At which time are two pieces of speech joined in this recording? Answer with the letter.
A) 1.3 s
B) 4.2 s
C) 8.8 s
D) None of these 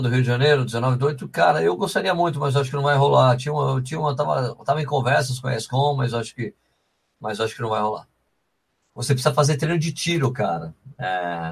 C